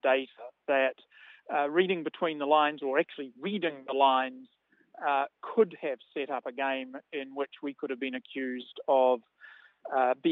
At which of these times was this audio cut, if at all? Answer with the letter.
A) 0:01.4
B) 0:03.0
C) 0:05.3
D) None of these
C